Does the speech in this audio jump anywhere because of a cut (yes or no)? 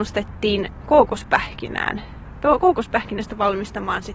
no